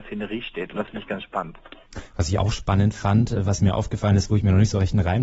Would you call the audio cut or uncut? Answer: uncut